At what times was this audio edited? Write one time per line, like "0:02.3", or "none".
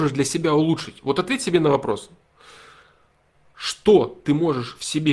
none